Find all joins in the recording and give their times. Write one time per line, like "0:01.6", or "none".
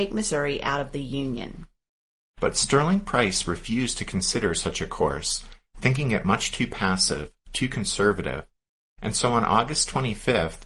none